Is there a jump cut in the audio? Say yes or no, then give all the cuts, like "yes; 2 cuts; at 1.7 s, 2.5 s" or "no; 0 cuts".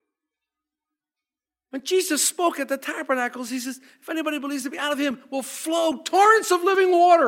no; 0 cuts